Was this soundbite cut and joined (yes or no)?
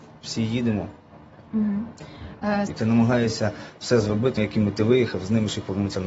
yes